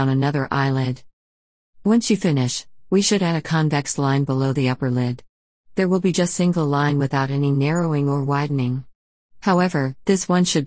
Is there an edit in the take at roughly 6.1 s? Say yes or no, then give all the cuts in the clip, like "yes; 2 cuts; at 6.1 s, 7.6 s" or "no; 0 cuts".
no; 0 cuts